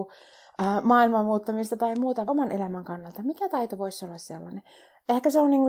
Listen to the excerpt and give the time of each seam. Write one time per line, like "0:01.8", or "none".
0:02.3